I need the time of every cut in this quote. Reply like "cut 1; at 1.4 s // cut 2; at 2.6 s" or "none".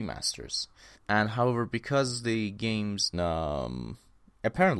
cut 1; at 1.0 s // cut 2; at 3.1 s